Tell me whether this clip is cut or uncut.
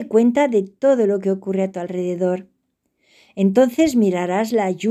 uncut